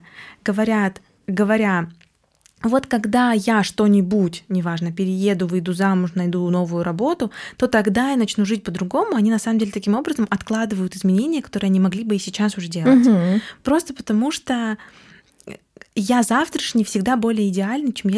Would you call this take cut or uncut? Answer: uncut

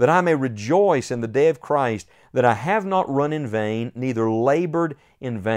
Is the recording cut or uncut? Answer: uncut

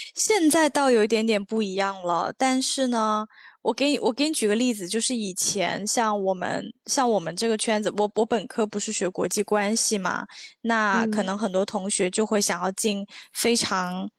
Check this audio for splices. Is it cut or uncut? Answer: uncut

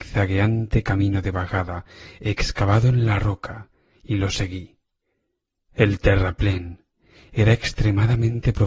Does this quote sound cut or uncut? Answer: uncut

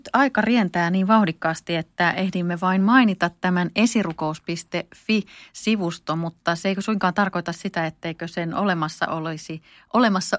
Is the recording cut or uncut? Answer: uncut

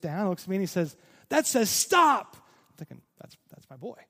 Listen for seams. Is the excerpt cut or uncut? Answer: uncut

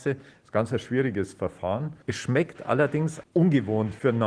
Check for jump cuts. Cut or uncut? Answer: cut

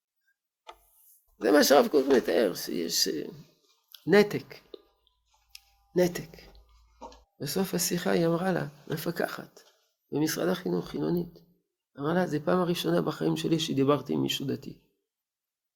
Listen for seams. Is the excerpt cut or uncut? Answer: cut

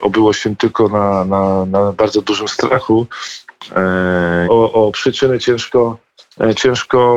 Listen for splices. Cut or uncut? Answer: cut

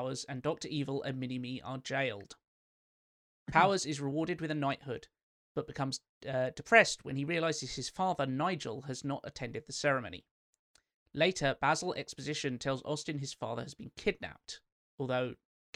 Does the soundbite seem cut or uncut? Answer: uncut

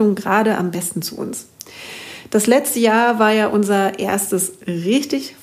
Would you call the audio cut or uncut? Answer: uncut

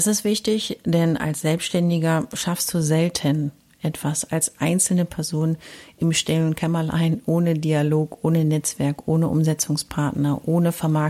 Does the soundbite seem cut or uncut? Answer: uncut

